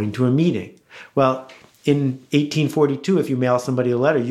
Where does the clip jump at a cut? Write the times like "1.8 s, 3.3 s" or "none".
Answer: none